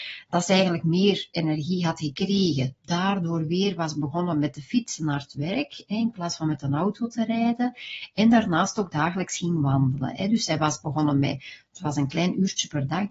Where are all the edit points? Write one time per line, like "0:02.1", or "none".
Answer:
none

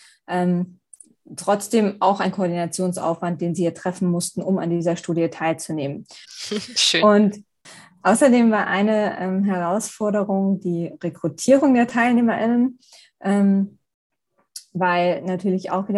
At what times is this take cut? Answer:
0:06.2

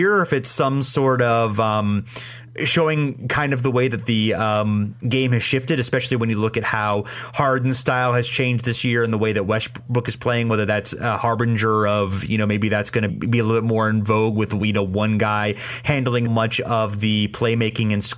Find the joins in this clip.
0:13.1
0:16.3

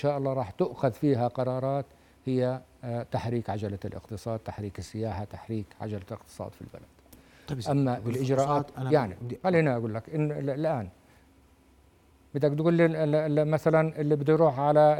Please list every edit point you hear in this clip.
none

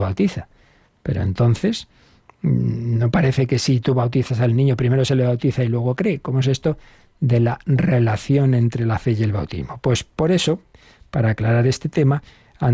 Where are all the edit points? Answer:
none

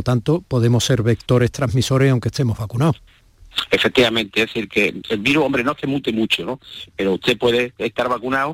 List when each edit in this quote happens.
none

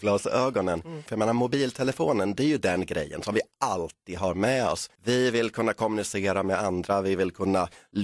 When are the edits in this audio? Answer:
0:01.1
0:05.0

